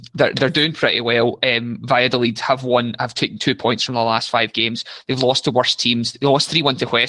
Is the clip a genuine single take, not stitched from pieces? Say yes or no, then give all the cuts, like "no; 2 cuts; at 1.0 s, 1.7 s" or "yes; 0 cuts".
yes; 0 cuts